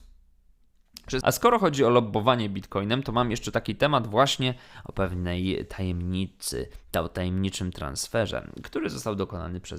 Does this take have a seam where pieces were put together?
yes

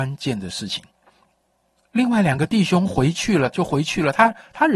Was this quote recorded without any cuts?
no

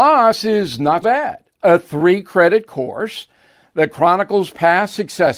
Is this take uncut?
no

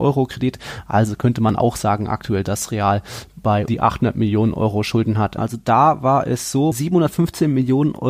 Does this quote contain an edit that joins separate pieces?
yes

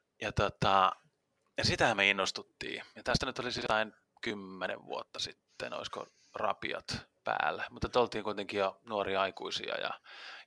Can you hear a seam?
no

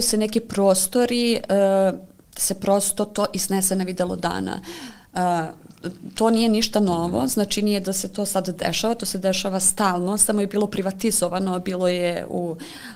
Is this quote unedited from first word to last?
yes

